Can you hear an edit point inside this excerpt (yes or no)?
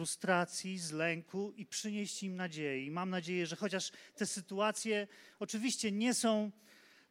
no